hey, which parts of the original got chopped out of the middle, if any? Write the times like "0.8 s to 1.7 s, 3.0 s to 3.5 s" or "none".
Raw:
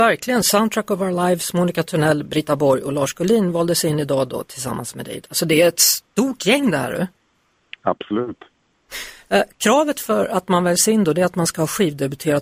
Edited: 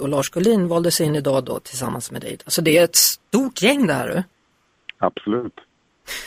none